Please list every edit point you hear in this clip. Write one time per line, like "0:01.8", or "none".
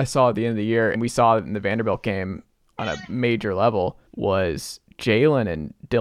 0:00.9
0:04.1